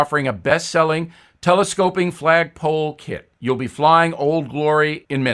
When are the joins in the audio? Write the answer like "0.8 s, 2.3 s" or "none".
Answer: 3.3 s